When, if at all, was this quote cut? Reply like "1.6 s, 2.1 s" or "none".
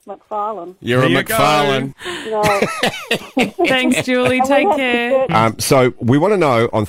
1.9 s, 5.3 s